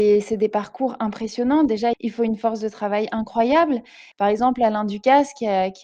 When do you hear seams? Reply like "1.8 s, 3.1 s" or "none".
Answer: 1.9 s, 4.1 s